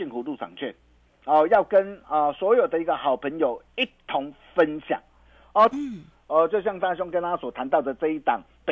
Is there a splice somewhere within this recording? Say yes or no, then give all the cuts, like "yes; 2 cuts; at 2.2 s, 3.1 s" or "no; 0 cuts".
yes; 1 cut; at 5.7 s